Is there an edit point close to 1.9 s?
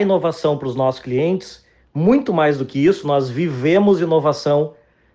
no; 0 cuts

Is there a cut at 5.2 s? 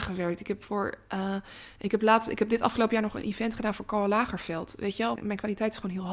yes; 1 cut; at 5.2 s

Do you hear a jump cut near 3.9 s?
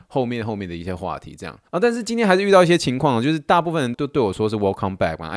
yes; 2 cuts; at 1.7 s, 3.9 s

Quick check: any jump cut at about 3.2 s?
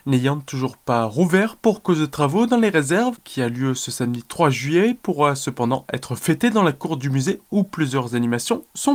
yes; 1 cut; at 3.2 s

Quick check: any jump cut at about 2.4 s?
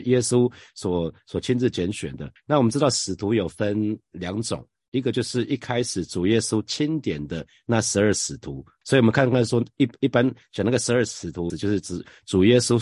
yes; 3 cuts; at 2.4 s, 8.8 s, 11.5 s

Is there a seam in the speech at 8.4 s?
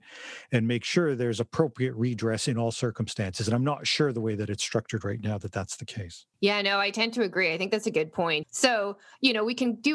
yes; 2 cuts; at 6.3 s, 8.4 s

